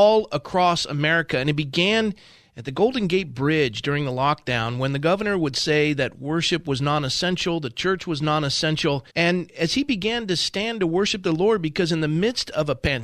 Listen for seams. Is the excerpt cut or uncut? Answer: cut